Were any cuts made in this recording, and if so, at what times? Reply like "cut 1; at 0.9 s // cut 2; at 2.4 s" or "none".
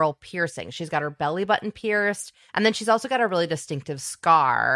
cut 1; at 2.5 s